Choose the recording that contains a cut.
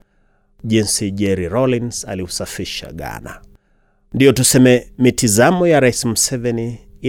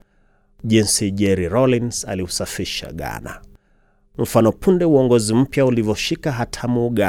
second; 1 cut; at 4.1 s

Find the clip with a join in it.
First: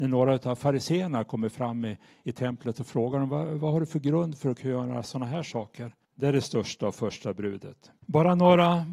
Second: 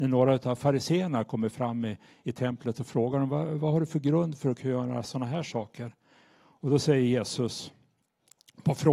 first; 2 cuts; at 6.0 s, 8.0 s

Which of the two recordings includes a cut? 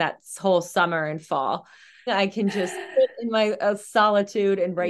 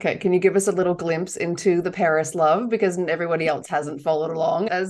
first; 1 cut; at 2.1 s

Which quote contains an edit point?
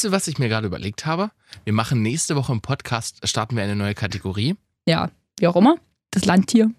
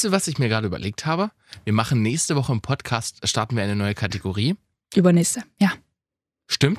first; 1 cut; at 4.8 s

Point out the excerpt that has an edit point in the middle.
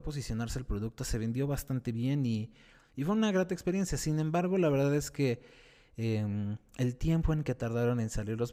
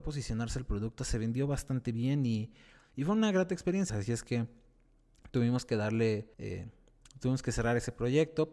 second; 2 cuts; at 3.9 s, 6.3 s

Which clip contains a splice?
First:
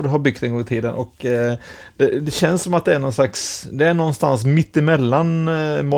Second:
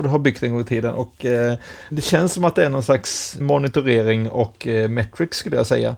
second; 2 cuts; at 1.9 s, 3.4 s

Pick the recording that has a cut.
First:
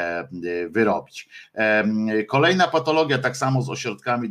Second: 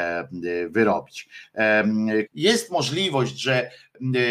second; 1 cut; at 2.3 s

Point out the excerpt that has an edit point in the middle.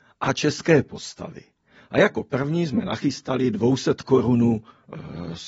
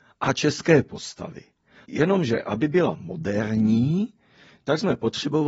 second; 1 cut; at 1.8 s

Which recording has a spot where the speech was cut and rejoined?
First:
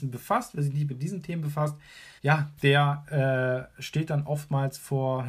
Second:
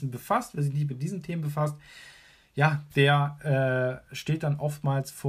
first; 1 cut; at 2.2 s

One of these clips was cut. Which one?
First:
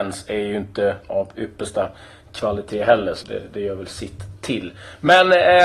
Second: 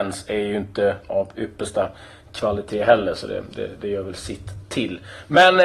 first; 1 cut; at 3.2 s

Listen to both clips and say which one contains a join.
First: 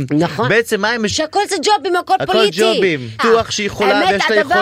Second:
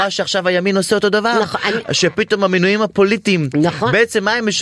first; 2 cuts; at 1.1 s, 3.2 s

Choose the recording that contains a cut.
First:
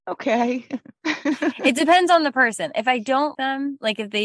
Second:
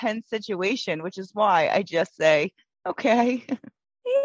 first; 2 cuts; at 1.0 s, 3.3 s

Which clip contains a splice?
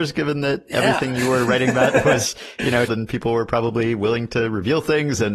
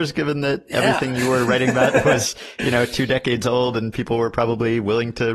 first; 1 cut; at 2.9 s

